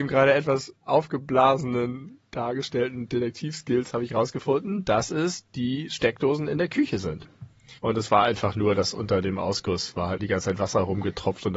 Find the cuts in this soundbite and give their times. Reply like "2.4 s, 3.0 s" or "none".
7.8 s, 10.2 s